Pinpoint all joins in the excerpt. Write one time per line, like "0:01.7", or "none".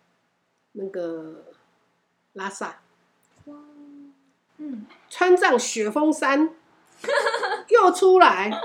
0:04.5